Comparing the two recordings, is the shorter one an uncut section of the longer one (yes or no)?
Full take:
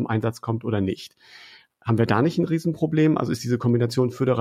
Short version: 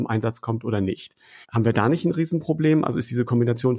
no